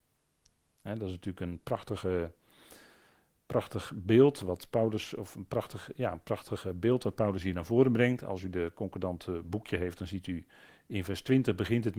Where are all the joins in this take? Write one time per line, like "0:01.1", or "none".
none